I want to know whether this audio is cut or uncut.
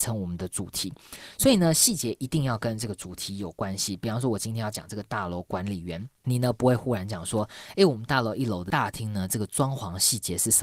uncut